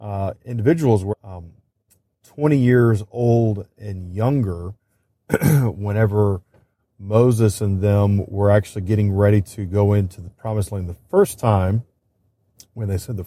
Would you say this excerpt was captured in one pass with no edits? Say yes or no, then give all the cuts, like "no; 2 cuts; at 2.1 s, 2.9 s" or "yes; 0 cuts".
no; 1 cut; at 1.1 s